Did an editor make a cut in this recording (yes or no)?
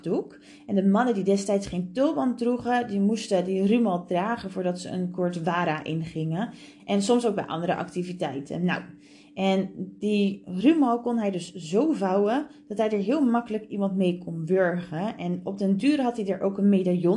yes